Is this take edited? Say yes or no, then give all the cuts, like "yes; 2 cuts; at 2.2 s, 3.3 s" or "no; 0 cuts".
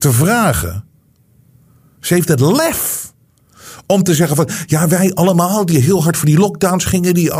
no; 0 cuts